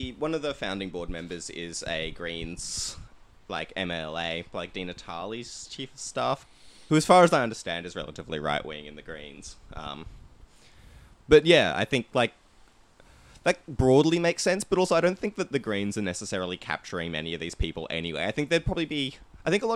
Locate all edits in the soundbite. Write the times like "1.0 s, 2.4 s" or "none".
6.9 s